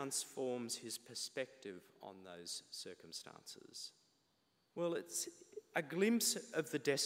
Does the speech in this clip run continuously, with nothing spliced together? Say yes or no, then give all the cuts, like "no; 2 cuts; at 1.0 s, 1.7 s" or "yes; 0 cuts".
no; 1 cut; at 4.7 s